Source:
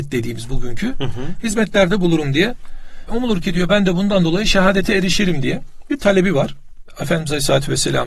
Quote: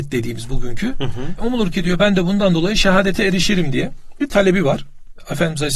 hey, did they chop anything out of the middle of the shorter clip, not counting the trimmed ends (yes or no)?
yes